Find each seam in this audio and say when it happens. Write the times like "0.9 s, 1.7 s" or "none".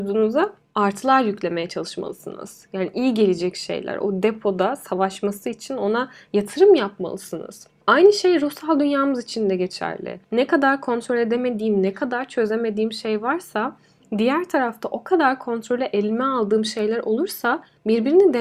none